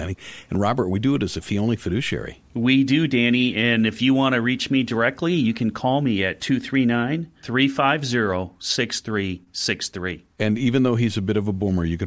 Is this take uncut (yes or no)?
yes